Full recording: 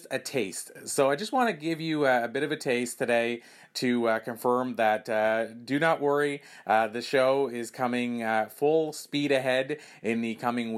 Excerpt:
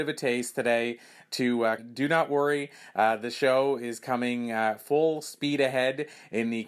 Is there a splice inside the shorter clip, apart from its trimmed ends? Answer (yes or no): yes